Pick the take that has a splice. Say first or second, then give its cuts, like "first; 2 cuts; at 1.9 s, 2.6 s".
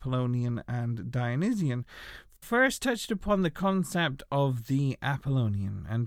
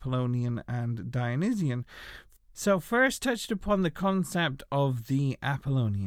first; 1 cut; at 2.4 s